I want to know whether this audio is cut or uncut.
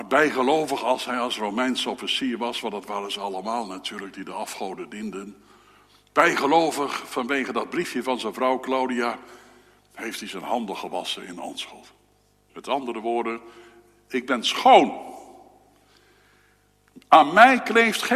cut